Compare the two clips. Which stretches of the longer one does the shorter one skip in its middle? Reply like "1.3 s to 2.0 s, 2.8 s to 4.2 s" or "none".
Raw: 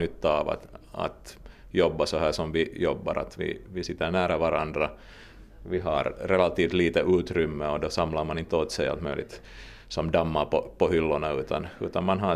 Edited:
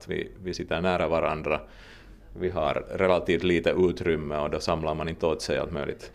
none

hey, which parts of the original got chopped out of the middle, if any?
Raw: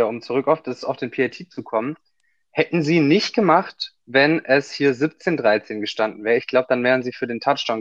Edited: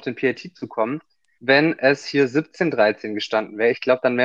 2.3 s to 4.0 s

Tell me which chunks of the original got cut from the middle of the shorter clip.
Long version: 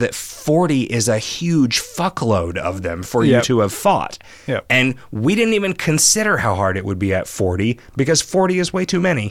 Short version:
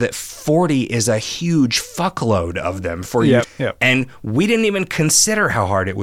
3.4 s to 4.3 s

